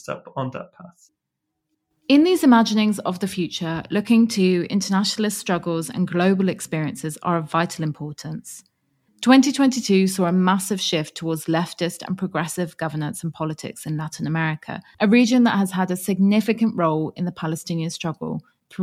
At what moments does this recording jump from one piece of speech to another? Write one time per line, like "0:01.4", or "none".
none